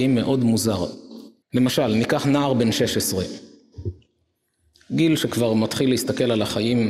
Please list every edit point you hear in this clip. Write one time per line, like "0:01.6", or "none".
0:01.4